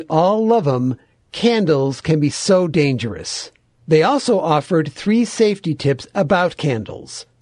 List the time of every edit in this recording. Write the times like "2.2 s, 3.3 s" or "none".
none